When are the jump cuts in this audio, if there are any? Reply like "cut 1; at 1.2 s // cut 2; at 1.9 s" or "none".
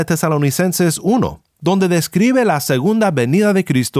none